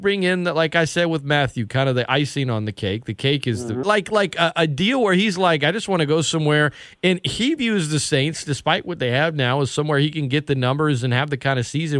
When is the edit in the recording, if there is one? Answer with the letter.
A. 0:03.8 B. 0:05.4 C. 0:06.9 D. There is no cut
A